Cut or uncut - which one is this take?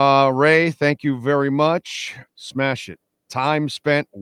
cut